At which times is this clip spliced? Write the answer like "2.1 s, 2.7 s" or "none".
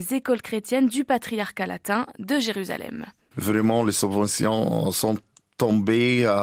3.3 s